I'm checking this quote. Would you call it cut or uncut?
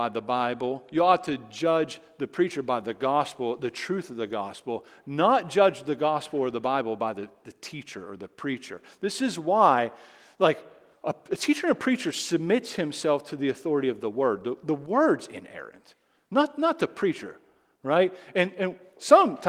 cut